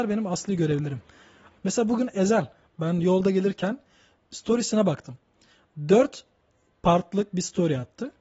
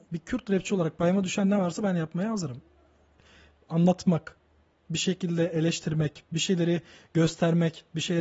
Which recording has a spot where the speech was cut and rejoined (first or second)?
first